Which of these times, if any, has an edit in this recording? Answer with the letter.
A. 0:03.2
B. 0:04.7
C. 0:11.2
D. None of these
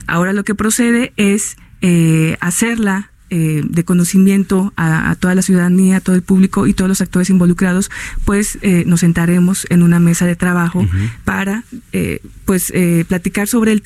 D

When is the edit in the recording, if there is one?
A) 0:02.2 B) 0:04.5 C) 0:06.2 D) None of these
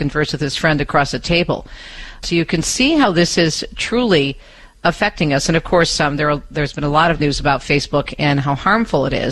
A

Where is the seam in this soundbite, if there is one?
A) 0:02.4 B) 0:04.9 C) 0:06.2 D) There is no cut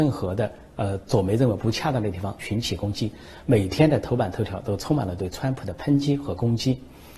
A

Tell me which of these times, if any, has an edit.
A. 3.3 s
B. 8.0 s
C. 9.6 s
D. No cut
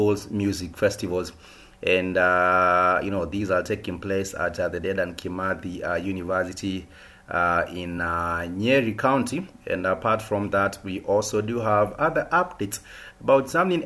D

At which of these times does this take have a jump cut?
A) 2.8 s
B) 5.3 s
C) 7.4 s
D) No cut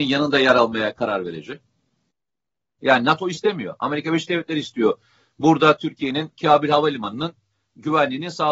A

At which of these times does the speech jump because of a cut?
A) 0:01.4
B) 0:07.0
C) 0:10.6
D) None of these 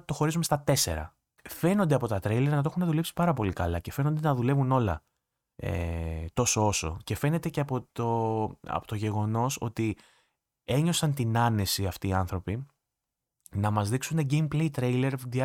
A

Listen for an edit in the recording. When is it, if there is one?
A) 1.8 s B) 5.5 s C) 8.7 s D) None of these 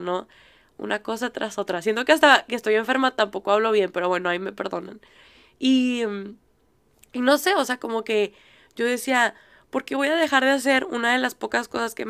D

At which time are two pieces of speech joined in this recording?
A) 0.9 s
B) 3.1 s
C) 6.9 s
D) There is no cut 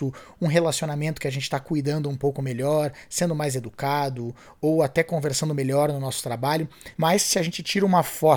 C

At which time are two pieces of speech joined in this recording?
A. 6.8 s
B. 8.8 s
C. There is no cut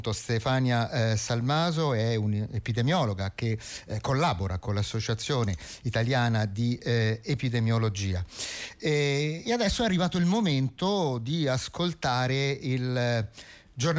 C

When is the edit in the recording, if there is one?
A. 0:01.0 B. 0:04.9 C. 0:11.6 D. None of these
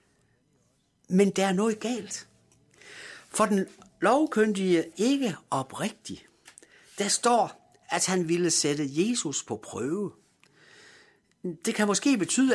B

